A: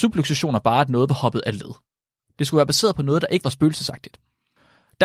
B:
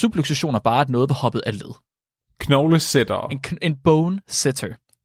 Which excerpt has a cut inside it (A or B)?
A